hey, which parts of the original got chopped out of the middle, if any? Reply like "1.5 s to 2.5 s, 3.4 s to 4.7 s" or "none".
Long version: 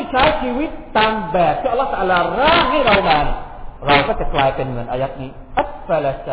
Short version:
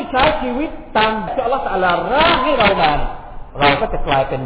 1.3 s to 1.5 s